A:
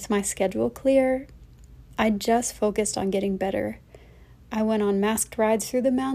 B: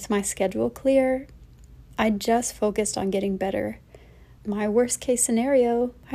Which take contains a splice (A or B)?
B